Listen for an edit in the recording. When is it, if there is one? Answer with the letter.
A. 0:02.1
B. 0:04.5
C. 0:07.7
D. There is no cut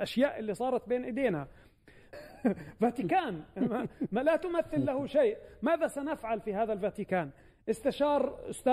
A